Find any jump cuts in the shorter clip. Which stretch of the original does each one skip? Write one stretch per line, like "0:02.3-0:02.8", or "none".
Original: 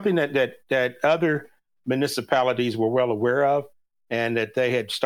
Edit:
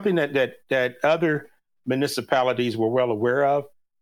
none

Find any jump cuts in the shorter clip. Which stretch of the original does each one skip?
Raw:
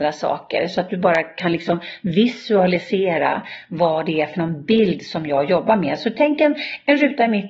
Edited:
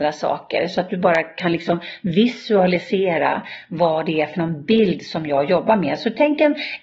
none

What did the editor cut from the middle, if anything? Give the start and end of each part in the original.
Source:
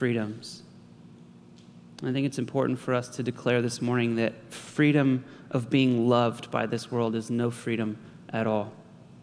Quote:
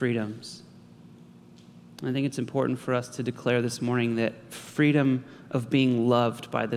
none

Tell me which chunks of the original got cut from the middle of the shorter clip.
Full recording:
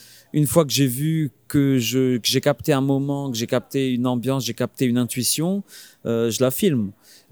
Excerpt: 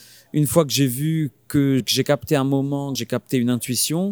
0:01.8-0:02.2
0:03.3-0:04.4

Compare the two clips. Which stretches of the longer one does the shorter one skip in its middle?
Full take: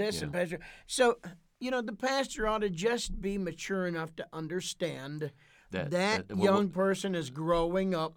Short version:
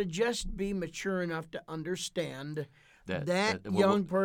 none

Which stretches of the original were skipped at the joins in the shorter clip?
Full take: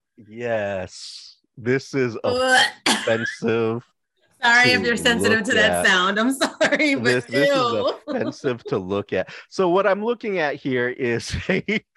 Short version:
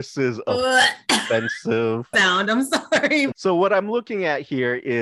0:03.9-0:05.8
0:07.0-0:09.5

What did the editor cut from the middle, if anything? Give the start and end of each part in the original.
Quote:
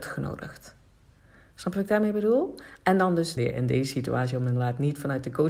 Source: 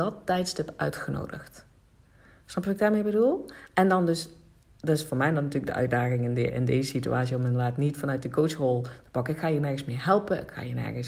0:04.3-0:06.4

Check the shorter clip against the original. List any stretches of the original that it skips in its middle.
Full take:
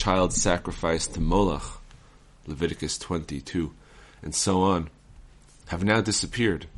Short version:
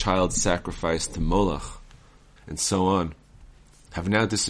0:02.4-0:04.1

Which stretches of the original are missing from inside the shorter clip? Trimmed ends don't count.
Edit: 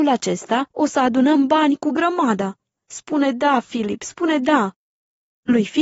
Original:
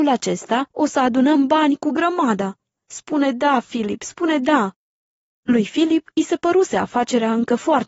none

